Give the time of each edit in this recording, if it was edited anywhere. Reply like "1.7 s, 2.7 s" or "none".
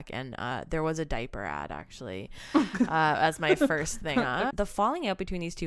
4.5 s

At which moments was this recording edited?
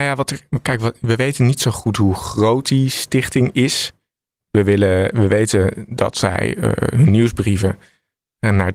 none

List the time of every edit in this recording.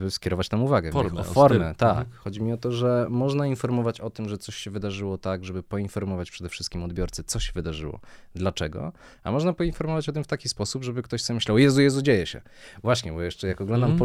0.9 s

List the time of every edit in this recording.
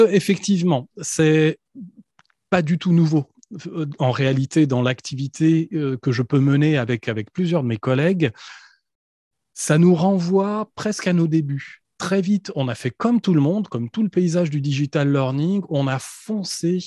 11.9 s

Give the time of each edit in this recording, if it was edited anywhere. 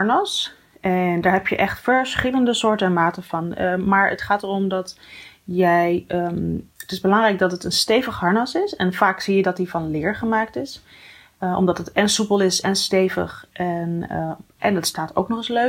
none

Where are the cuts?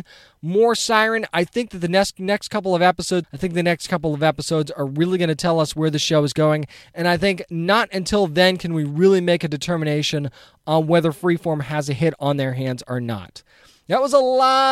3.2 s

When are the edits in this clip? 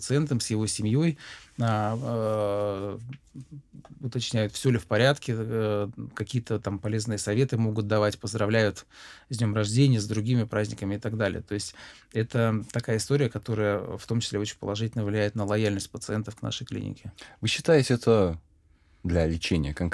none

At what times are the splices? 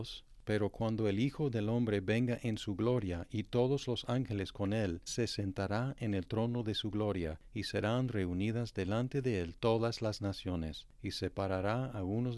5.1 s

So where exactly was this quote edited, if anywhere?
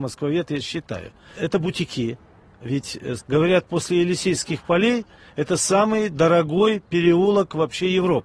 3.2 s

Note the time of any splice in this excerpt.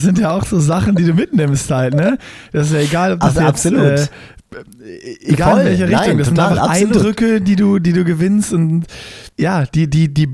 9.3 s

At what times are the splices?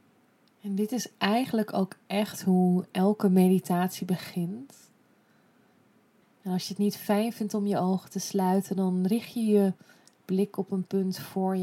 6.2 s

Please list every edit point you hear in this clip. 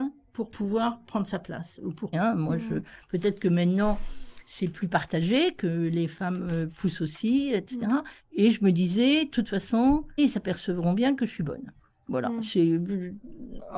2.1 s, 8.2 s, 10.2 s

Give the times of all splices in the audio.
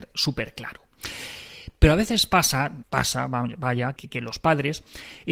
2.8 s, 4.0 s

